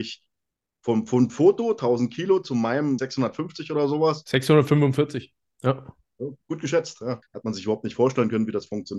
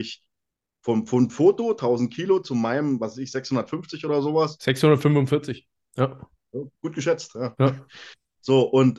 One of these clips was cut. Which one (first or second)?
first